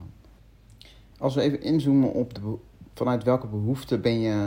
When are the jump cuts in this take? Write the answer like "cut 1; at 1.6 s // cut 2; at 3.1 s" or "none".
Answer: cut 1; at 1.1 s